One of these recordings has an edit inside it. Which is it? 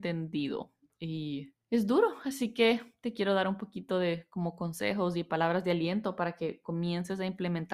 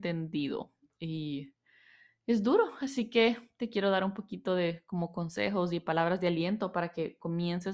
first; 1 cut; at 1.6 s

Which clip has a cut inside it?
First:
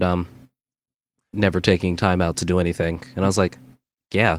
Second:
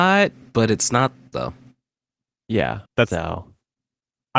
second; 2 cuts; at 1.3 s, 2.9 s

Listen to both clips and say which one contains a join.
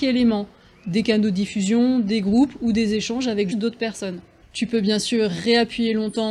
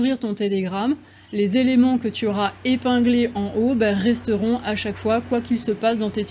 first; 1 cut; at 3.5 s

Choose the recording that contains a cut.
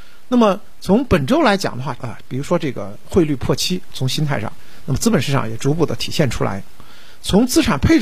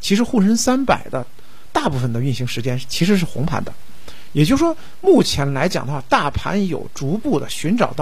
first; 2 cuts; at 2.0 s, 3.9 s

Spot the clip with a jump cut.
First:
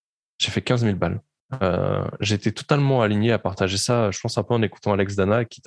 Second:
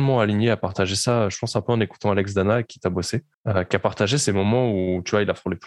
second; 1 cut; at 3.3 s

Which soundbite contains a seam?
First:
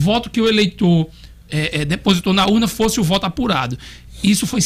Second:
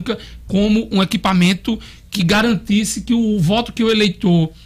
second; 1 cut; at 0.9 s

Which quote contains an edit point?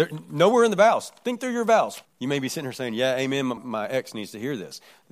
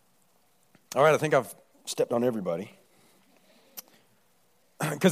first; 2 cuts; at 2.1 s, 3.6 s

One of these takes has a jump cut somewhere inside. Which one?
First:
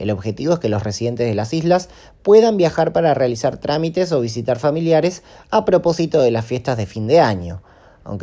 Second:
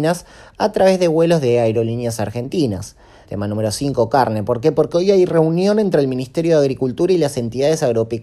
second; 1 cut; at 3.2 s

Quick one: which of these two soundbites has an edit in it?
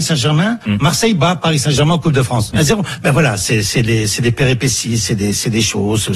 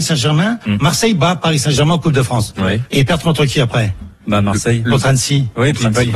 first; 1 cut; at 2.5 s

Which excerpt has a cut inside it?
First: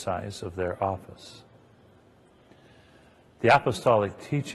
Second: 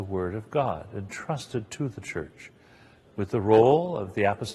second; 1 cut; at 3.0 s

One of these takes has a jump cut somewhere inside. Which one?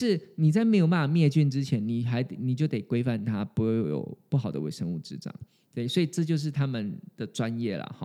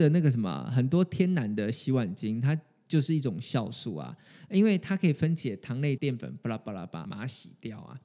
second; 2 cuts; at 6.0 s, 7.0 s

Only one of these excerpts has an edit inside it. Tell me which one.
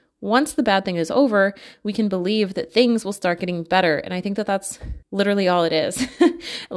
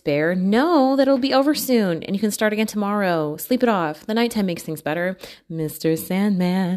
first; 1 cut; at 5.0 s

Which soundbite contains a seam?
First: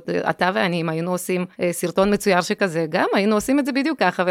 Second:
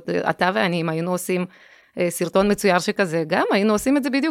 first; 1 cut; at 1.5 s

